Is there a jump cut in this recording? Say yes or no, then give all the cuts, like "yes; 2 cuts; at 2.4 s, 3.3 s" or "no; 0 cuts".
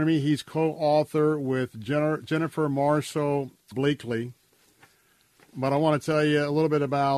yes; 1 cut; at 3.7 s